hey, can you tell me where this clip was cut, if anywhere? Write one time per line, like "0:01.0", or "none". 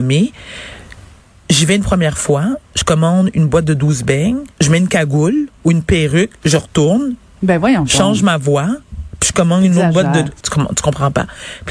0:04.5
0:10.4